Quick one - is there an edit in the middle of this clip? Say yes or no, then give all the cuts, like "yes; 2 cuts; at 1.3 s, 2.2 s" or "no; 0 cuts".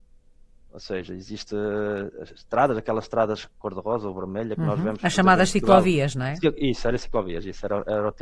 no; 0 cuts